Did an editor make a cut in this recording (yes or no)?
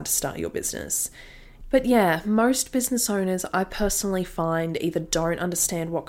yes